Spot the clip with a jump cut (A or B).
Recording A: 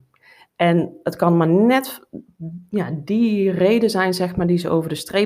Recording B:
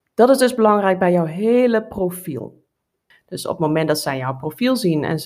B